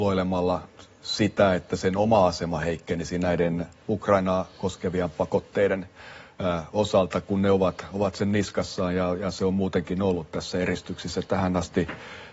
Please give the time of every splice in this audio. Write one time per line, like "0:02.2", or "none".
none